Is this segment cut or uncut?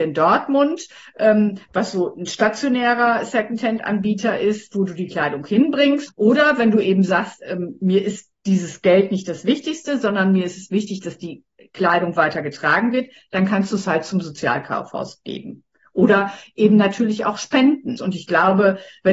cut